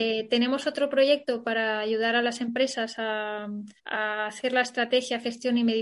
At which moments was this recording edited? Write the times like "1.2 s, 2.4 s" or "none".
3.8 s